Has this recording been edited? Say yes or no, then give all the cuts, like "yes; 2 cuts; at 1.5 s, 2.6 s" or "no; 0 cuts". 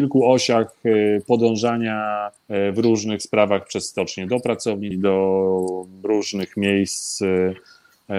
yes; 2 cuts; at 2.4 s, 4.9 s